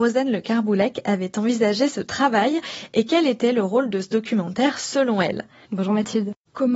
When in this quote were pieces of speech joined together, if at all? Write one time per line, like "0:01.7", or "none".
0:05.7